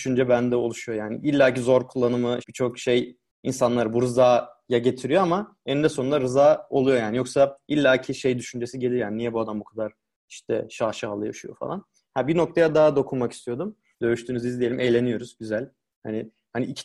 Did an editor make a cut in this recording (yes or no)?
yes